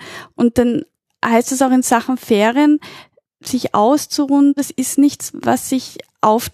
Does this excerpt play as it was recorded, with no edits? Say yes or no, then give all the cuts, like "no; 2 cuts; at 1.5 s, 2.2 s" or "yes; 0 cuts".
no; 1 cut; at 4.6 s